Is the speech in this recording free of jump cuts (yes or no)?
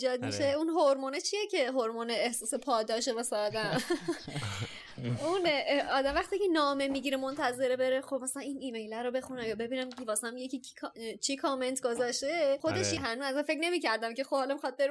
no